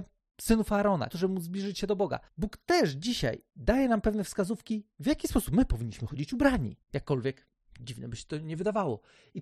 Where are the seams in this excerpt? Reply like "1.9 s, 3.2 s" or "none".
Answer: 1.1 s